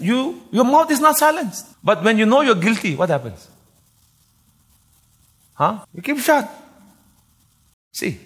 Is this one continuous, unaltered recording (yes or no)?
no